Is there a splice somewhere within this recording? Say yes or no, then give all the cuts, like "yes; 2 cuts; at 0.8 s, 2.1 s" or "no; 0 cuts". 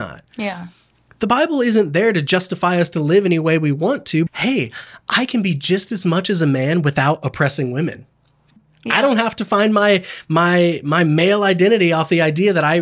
yes; 2 cuts; at 4.3 s, 8.6 s